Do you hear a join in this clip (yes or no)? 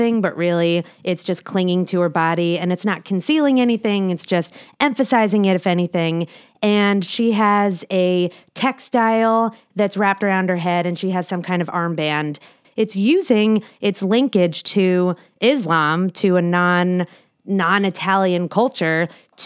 yes